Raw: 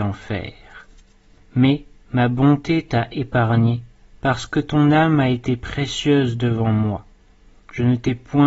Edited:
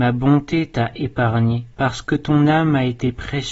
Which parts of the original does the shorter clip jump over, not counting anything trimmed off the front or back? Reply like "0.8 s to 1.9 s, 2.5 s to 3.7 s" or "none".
3.9 s to 4.2 s